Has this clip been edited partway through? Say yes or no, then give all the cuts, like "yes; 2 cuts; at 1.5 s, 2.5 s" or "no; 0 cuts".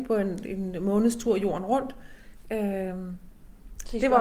yes; 1 cut; at 2.4 s